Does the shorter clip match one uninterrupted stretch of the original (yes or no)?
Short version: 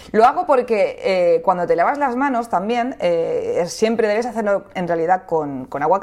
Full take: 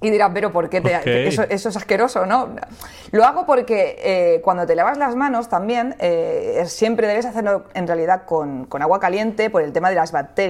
yes